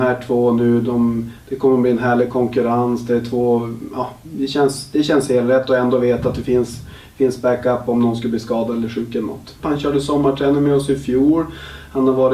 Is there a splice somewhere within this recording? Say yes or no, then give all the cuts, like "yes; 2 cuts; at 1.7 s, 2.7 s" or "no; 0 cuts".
yes; 1 cut; at 9.6 s